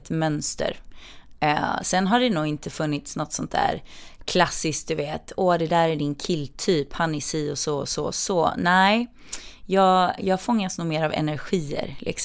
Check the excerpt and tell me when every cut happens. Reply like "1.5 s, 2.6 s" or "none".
10.2 s